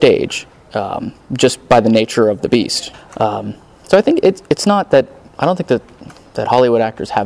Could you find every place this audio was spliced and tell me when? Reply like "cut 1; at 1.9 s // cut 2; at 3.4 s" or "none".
cut 1; at 2.9 s